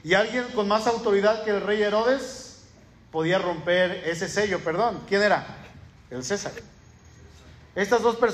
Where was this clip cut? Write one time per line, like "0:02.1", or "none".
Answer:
none